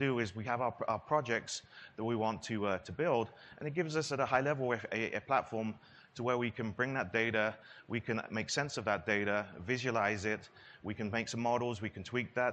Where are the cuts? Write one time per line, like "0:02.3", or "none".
none

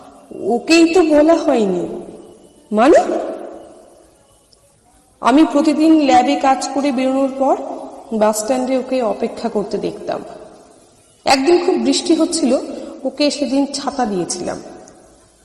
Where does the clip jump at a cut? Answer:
none

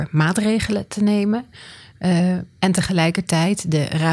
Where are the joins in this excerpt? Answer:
none

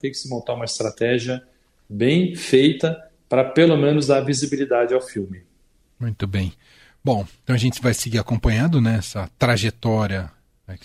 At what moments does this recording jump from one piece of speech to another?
none

